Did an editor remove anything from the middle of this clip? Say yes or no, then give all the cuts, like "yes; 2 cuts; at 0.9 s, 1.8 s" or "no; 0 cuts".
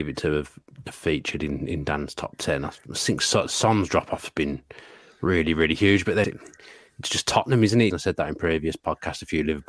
yes; 2 cuts; at 6.2 s, 7.9 s